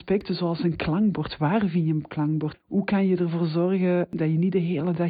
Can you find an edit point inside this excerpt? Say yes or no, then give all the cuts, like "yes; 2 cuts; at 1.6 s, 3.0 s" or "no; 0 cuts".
yes; 1 cut; at 2.5 s